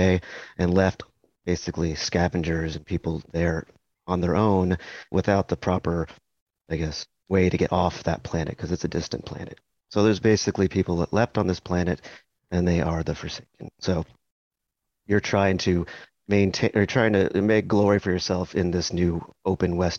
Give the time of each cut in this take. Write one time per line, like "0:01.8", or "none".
0:05.1

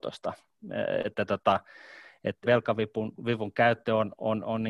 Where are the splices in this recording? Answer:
0:02.4

